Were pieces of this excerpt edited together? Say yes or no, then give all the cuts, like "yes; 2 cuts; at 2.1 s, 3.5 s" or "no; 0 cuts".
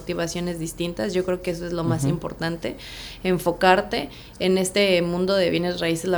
no; 0 cuts